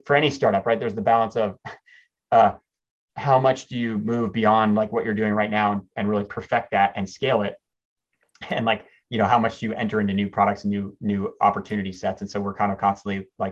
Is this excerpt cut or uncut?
uncut